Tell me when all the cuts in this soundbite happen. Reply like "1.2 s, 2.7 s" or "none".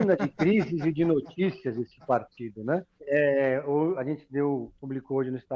3.0 s